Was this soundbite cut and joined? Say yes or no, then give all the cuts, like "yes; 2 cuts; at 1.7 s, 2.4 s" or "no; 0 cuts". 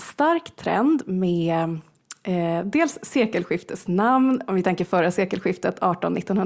no; 0 cuts